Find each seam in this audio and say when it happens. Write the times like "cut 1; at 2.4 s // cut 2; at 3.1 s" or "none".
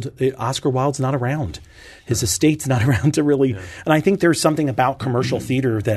none